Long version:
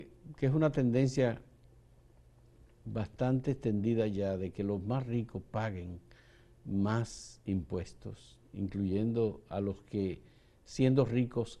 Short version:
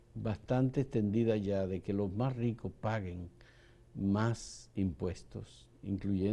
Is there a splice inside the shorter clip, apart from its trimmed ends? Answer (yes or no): no